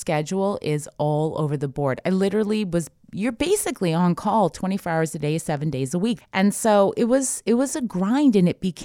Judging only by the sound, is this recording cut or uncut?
cut